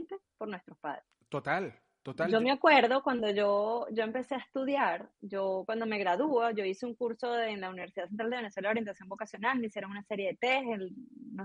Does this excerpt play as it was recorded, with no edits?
yes; 0 cuts

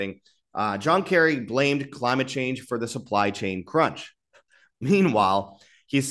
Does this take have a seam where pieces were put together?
no; 0 cuts

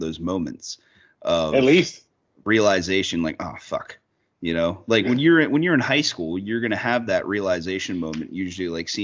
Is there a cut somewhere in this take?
no; 0 cuts

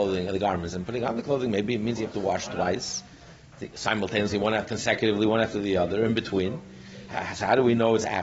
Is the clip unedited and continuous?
yes; 0 cuts

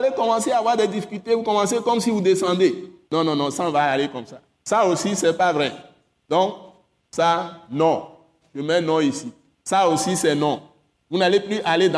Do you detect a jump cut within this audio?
yes; 1 cut; at 3.1 s

